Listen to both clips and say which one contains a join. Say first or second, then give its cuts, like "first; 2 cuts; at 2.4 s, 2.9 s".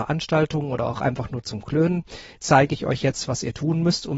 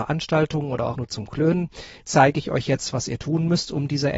second; 1 cut; at 0.9 s